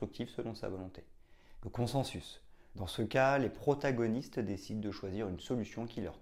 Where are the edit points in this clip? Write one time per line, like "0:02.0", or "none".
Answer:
0:01.6
0:02.7